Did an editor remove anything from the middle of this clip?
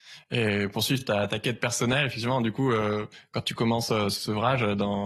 no; 0 cuts

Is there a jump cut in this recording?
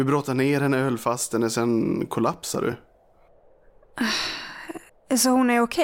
yes; 1 cut; at 4.9 s

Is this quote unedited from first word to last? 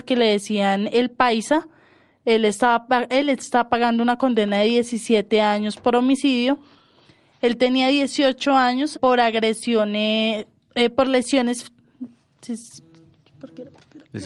no; 2 cuts; at 7.3 s, 8.9 s

